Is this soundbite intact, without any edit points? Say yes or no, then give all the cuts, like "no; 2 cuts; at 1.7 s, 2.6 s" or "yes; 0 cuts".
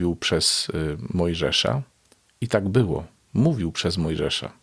yes; 0 cuts